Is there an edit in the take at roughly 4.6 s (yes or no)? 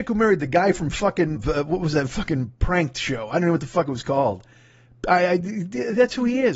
no